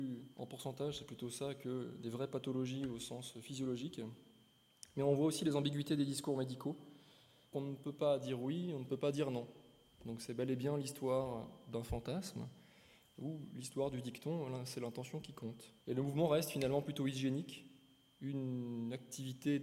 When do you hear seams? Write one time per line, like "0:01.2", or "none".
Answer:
0:07.5
0:15.8